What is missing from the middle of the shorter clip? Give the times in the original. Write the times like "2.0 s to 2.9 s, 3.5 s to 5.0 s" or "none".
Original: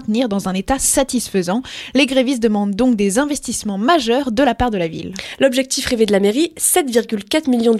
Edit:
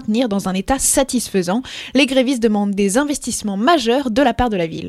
2.8 s to 3.0 s